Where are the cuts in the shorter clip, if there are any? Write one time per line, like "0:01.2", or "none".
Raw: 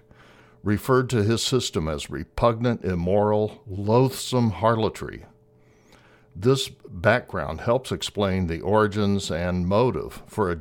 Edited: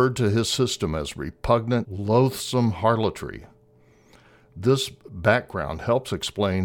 0:01.8